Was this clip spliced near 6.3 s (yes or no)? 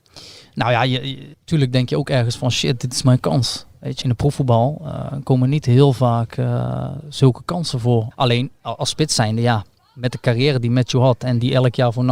no